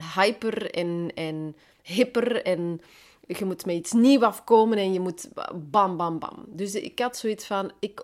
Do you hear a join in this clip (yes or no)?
no